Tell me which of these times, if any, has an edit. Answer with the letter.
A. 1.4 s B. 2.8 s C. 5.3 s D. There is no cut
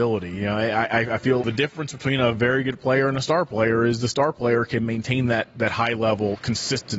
A